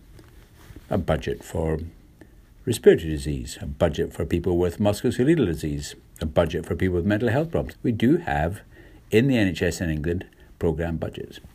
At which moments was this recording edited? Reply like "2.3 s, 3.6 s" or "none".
7.7 s